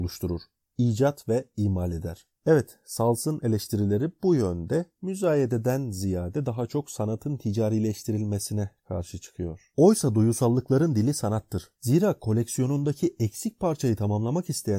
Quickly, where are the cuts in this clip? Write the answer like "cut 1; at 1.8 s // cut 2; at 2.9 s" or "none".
cut 1; at 2.3 s // cut 2; at 9.7 s // cut 3; at 11.8 s